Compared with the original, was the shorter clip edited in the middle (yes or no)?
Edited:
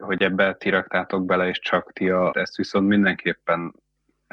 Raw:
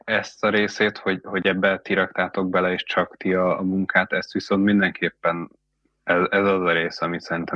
yes